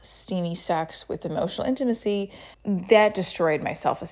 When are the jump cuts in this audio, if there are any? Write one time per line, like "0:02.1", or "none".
0:02.5